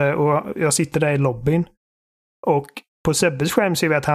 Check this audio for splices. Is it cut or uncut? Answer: uncut